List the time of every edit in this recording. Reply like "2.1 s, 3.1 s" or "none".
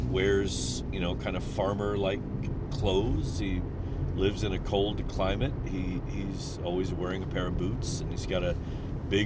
none